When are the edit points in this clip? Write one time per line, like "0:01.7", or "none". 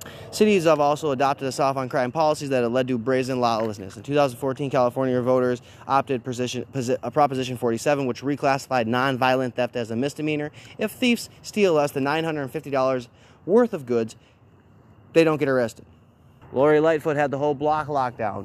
0:16.4